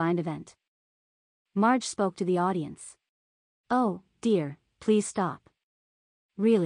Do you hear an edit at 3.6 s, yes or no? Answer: yes